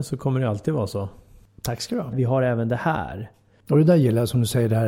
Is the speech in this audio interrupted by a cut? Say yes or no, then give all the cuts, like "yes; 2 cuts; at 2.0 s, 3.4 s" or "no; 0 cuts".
yes; 1 cut; at 2.1 s